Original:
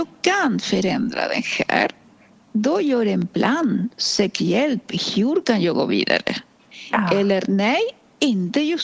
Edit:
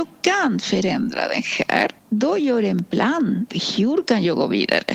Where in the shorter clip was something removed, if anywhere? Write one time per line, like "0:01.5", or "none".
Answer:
0:02.0
0:03.5

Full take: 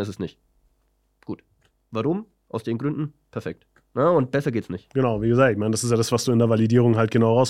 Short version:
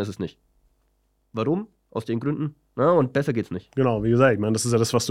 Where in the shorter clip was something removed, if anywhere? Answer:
0:01.2
0:02.6

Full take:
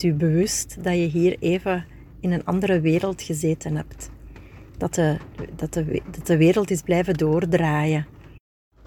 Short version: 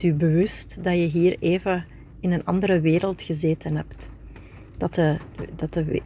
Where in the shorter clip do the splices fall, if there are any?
none

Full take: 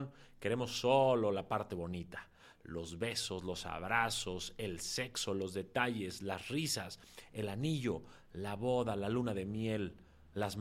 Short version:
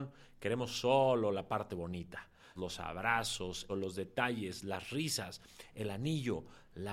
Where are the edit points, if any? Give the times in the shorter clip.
0:02.6
0:03.7

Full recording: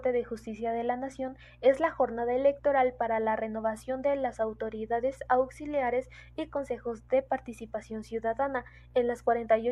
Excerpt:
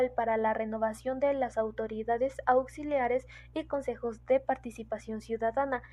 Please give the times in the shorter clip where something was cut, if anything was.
none

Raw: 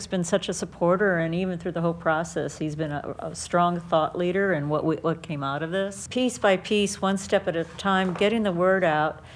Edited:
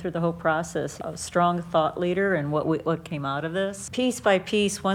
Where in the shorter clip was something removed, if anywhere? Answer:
0:01.0

